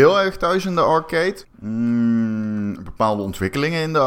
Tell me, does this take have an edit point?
yes; 2 cuts; at 1.4 s, 2.8 s

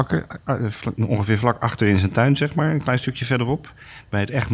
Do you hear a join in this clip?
no; 0 cuts

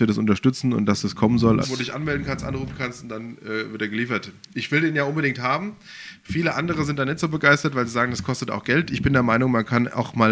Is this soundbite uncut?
no; 1 cut; at 1.6 s

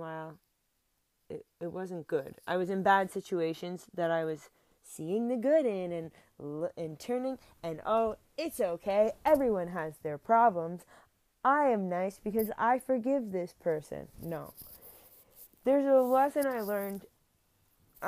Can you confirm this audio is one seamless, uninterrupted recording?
yes; 0 cuts

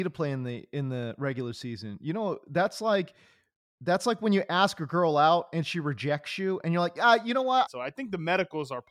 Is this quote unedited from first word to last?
no; 1 cut; at 7.7 s

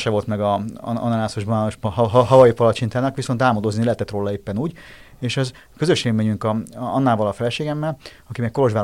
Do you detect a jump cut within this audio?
no; 0 cuts

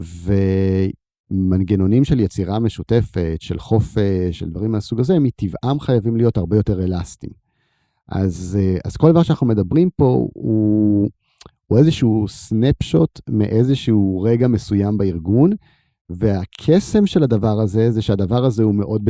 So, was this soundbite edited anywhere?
no; 0 cuts

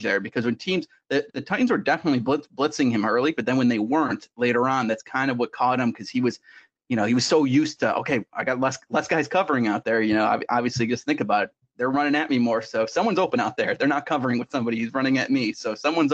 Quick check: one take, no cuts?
yes; 0 cuts

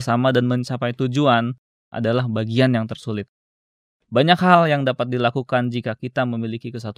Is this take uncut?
no; 1 cut; at 1.9 s

